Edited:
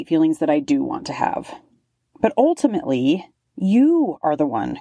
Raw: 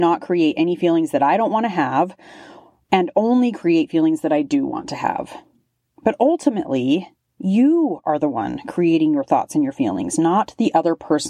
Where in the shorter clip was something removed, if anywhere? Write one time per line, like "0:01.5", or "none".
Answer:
none